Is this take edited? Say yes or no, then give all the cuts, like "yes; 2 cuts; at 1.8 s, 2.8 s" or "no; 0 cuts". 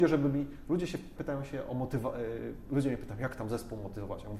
yes; 1 cut; at 1.2 s